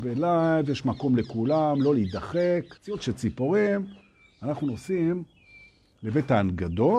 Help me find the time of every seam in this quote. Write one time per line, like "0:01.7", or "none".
0:02.8